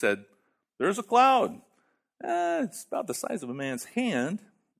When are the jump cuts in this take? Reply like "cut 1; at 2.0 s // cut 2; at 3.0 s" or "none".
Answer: none

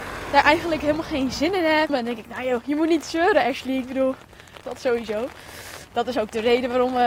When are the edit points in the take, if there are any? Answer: cut 1; at 1.9 s // cut 2; at 4.6 s // cut 3; at 5.8 s

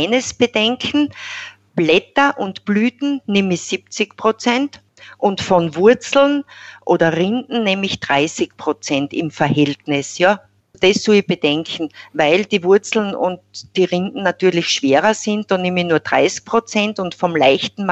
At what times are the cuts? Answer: cut 1; at 10.7 s

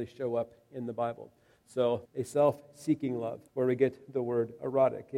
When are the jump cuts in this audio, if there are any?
cut 1; at 2.1 s // cut 2; at 3.5 s

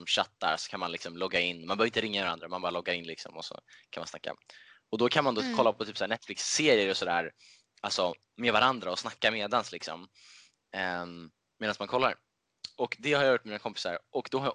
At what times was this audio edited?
none

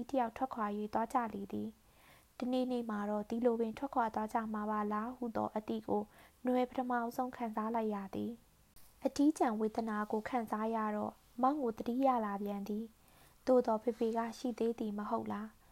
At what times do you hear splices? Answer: none

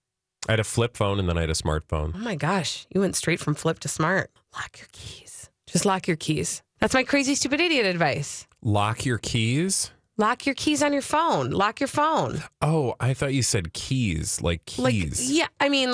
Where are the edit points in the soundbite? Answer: cut 1; at 4.4 s // cut 2; at 6.8 s

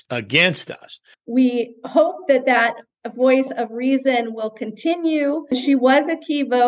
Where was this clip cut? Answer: cut 1; at 1.1 s

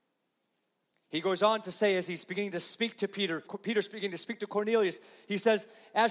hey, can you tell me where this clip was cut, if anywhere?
cut 1; at 3.5 s

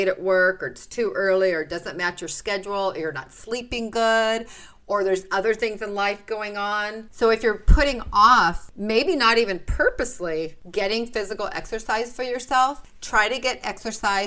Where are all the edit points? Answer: cut 1; at 7.1 s

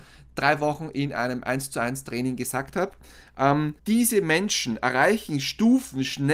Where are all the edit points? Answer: cut 1; at 3.8 s

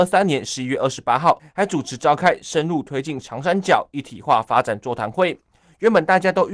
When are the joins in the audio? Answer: cut 1; at 1.4 s

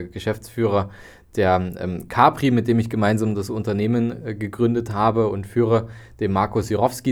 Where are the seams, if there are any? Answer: none

